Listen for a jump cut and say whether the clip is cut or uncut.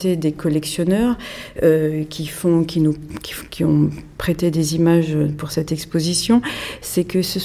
uncut